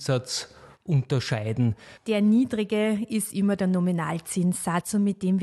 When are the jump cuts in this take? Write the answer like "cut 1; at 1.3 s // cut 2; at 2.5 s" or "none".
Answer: cut 1; at 2.0 s